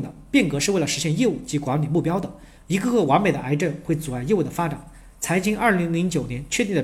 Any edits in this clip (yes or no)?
yes